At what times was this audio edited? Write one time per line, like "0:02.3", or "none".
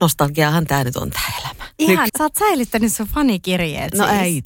0:02.1